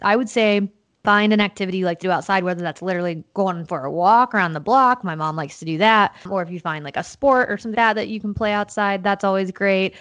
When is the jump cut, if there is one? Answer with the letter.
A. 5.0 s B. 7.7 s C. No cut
B